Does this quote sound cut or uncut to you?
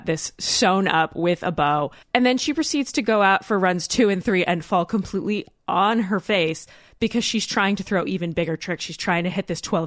cut